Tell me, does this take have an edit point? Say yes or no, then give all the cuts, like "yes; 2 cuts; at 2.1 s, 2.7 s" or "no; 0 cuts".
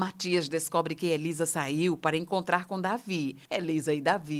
no; 0 cuts